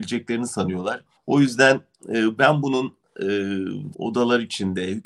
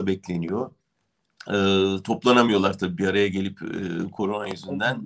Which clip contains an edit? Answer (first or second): first